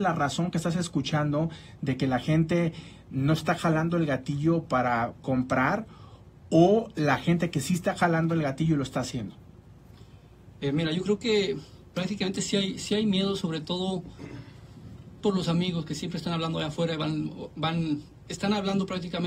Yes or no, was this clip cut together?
yes